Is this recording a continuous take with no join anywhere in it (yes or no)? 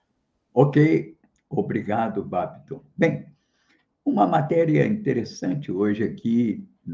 yes